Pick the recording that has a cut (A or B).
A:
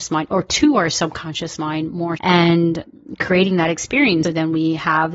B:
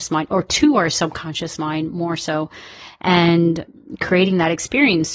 A